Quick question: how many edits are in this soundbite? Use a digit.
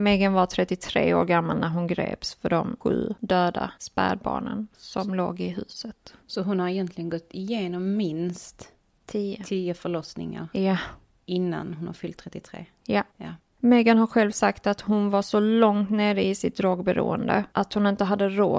1